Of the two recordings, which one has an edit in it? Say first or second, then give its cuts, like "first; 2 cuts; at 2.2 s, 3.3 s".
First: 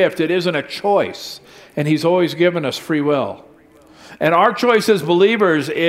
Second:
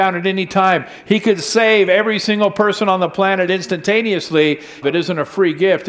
second; 1 cut; at 4.8 s